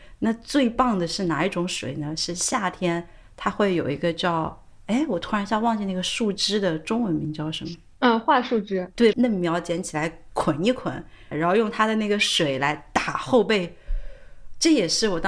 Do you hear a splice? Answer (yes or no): yes